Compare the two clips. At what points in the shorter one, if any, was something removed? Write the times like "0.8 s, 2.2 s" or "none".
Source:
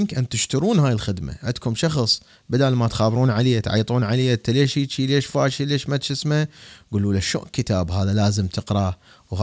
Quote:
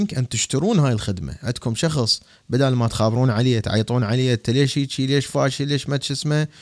none